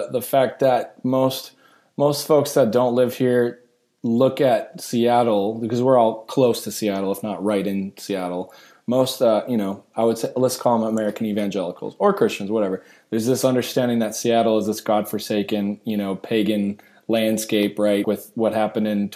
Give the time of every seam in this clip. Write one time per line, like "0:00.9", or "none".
0:18.0